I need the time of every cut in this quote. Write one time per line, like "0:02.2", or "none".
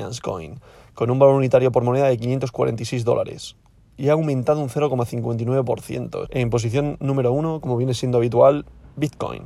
0:06.2